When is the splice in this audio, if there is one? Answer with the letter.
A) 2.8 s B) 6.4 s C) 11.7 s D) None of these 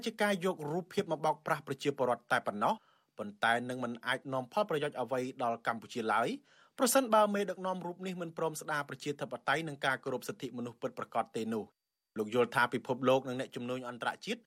D